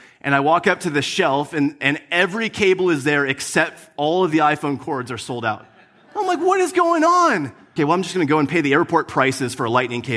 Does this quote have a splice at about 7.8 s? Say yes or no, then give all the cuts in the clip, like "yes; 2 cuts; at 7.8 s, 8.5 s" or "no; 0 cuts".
yes; 1 cut; at 7.8 s